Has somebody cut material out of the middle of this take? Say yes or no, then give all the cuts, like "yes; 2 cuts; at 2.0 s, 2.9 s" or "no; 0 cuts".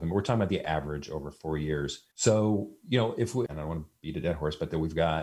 yes; 2 cuts; at 2.1 s, 3.5 s